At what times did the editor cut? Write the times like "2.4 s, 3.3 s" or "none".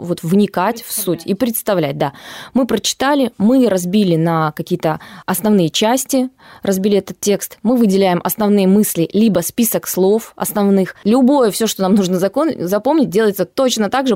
11.0 s